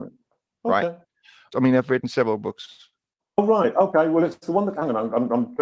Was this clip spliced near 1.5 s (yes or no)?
yes